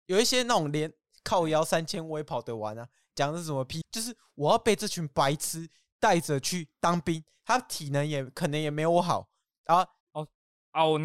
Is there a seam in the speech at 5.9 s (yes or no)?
no